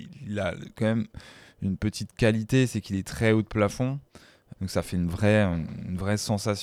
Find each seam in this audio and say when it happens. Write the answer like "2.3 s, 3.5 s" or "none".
4.5 s